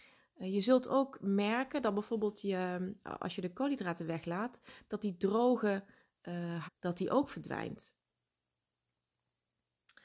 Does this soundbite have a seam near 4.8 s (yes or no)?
no